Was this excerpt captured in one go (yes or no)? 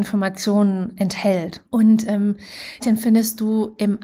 no